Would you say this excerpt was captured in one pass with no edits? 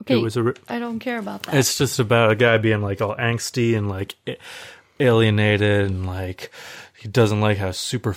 yes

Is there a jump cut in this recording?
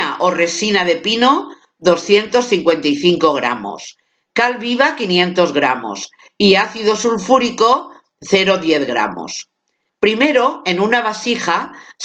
yes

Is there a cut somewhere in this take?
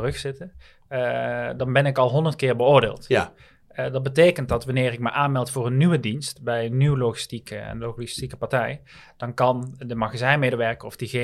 no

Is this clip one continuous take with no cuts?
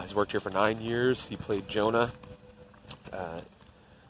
yes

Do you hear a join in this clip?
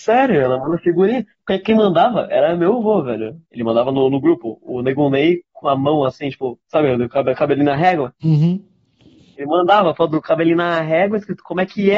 yes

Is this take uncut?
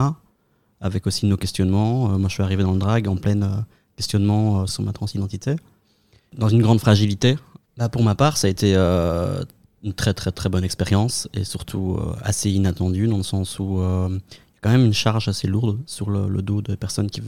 no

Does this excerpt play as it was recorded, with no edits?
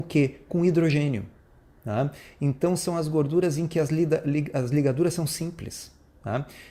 yes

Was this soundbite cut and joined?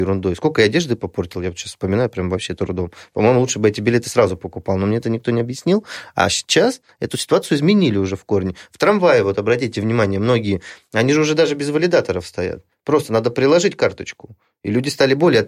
no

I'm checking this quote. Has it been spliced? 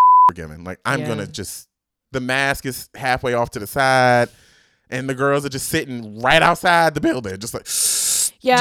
no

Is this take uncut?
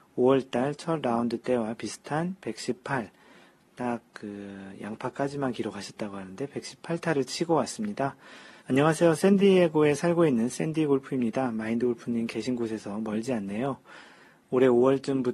no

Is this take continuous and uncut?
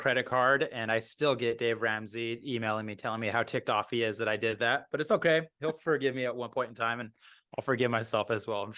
yes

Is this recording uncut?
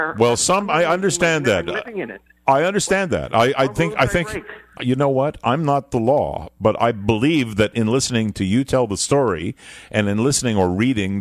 no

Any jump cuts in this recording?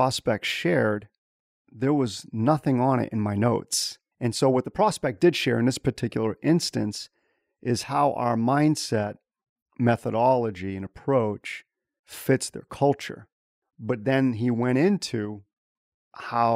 yes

